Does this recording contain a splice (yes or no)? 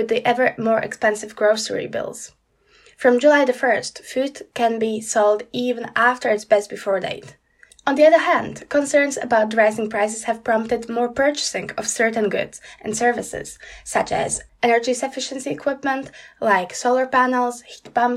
yes